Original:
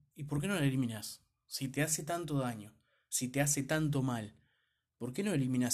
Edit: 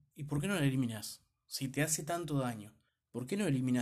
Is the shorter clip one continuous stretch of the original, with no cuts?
no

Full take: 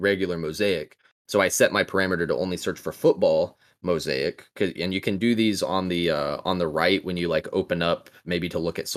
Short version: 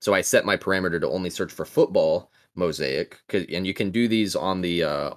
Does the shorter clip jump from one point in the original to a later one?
no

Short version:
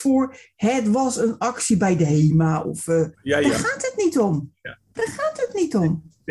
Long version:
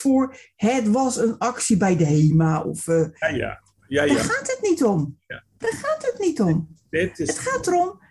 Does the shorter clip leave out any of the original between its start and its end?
yes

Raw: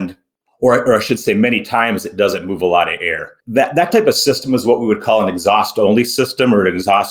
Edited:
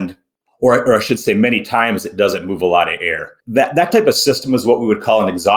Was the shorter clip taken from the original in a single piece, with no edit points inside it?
yes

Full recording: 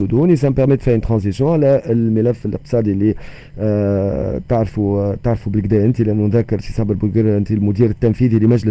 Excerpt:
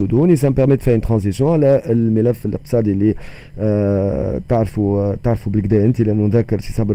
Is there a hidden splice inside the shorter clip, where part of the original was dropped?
no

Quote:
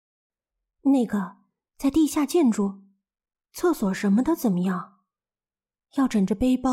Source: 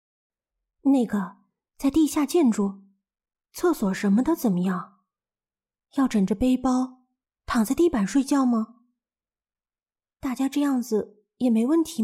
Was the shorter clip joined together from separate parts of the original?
no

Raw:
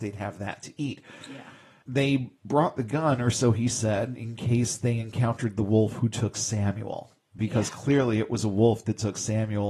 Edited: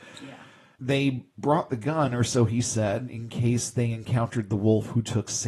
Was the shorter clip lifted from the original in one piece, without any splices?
yes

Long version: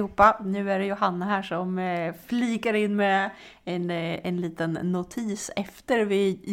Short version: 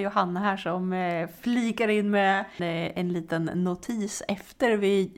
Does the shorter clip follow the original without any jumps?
no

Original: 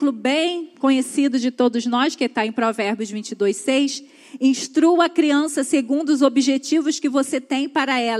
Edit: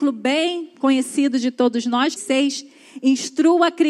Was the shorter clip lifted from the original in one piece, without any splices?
no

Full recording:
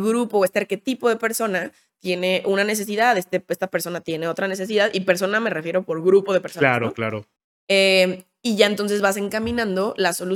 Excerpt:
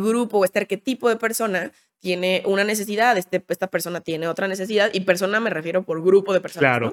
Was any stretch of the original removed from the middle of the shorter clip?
no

